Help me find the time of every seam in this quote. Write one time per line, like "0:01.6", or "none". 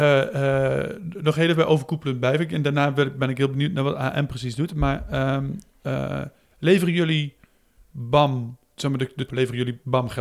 0:09.3